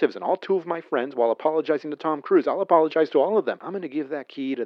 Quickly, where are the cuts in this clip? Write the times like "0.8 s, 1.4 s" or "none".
3.6 s